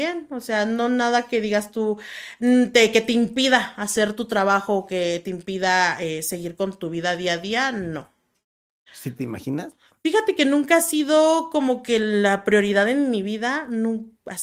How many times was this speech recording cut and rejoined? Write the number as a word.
one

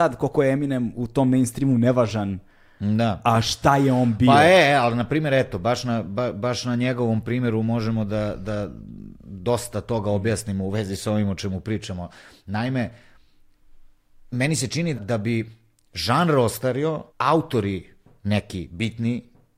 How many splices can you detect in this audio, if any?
two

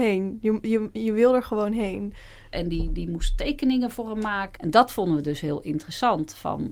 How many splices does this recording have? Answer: two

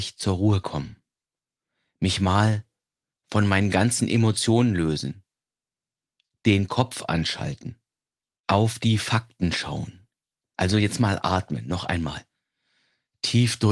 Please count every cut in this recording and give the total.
one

